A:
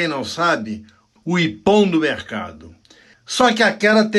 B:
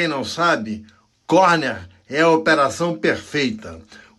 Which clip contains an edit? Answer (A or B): A